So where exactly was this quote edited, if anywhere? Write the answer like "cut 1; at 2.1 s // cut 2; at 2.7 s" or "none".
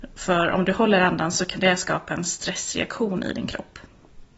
none